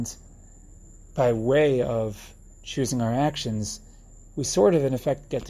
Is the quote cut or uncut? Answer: uncut